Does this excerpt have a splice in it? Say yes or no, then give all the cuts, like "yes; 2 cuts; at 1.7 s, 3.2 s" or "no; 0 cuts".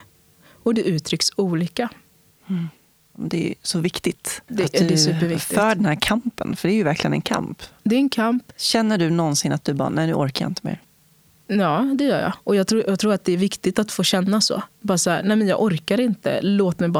no; 0 cuts